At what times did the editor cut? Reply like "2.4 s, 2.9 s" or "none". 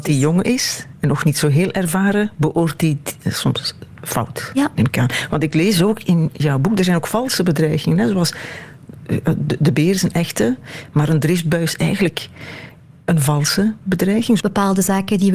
14.4 s